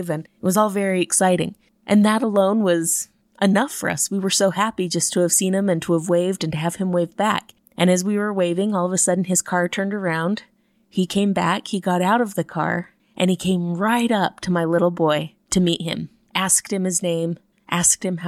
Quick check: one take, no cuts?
yes; 0 cuts

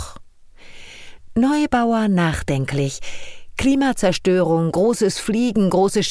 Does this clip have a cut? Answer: no; 0 cuts

